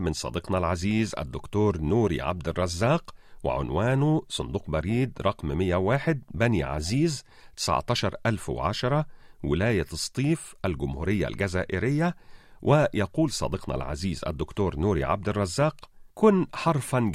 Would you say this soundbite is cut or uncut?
cut